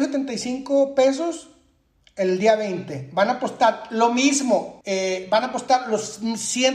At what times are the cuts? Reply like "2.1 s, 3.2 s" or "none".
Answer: 4.8 s